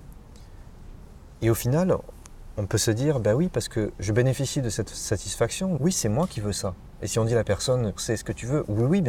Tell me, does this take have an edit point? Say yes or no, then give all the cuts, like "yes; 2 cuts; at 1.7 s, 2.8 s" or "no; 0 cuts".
yes; 2 cuts; at 5.8 s, 8.0 s